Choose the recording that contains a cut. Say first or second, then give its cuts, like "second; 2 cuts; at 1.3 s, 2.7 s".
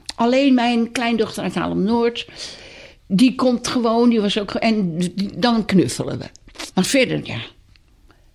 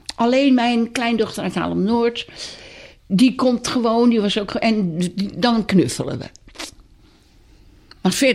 first; 1 cut; at 6.7 s